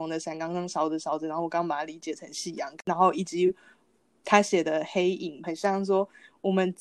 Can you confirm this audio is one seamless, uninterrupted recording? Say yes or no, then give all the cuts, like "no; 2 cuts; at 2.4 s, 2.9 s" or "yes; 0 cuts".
no; 1 cut; at 5.4 s